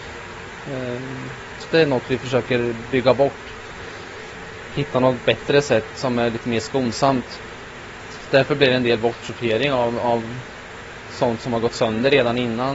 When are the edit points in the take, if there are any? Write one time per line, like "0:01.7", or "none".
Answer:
0:01.6